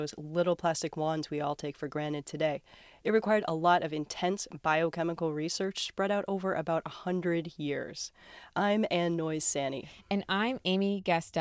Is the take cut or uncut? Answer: uncut